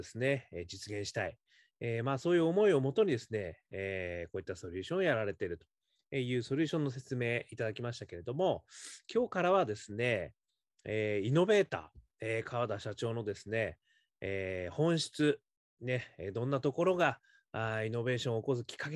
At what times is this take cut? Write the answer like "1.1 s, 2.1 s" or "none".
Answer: none